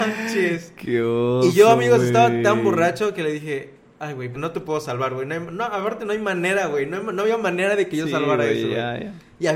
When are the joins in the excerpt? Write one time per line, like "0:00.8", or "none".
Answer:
0:04.3